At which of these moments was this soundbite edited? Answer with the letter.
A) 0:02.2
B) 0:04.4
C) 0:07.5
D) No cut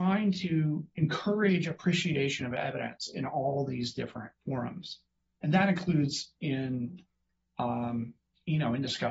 B